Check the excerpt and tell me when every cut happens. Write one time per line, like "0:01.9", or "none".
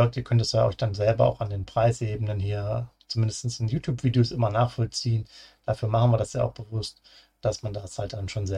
none

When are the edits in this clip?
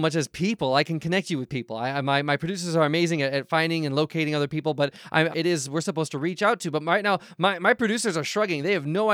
0:05.3

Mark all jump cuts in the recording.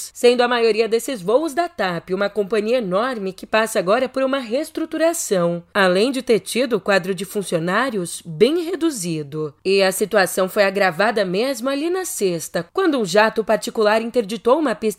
none

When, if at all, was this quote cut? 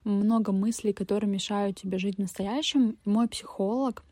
0:03.0

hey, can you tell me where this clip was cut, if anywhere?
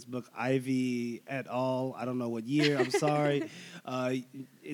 none

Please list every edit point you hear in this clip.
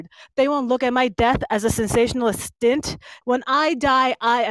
0:03.2

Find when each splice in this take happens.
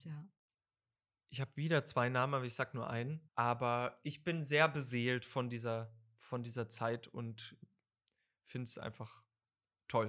0:03.3

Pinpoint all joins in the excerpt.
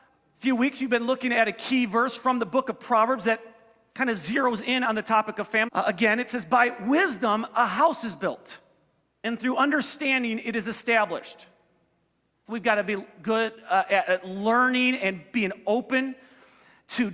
0:05.7
0:12.5

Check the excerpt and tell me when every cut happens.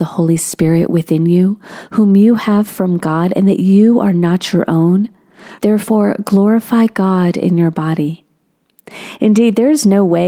0:05.6

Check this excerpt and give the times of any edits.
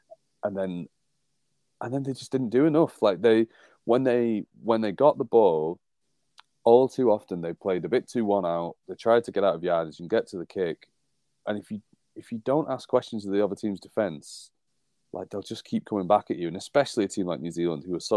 none

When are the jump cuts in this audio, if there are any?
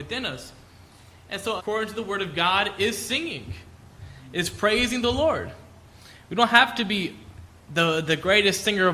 0:01.6

